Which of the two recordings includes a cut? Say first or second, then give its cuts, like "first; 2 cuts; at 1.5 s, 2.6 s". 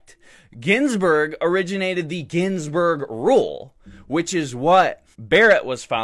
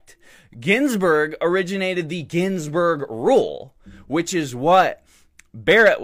first; 1 cut; at 5.1 s